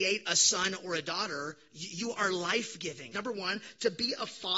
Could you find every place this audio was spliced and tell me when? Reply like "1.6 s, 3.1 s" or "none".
3.1 s